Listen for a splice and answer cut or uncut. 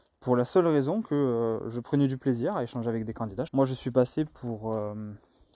cut